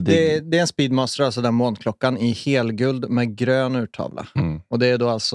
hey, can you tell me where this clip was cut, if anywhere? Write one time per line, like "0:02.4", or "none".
none